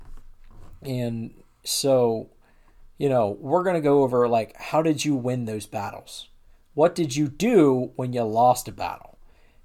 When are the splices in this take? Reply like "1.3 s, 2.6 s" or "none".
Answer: none